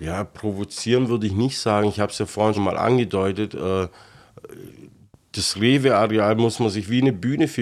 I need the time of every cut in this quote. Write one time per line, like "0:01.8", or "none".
0:02.5